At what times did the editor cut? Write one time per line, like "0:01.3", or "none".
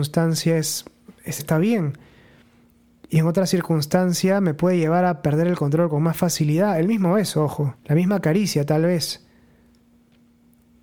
0:01.4
0:07.8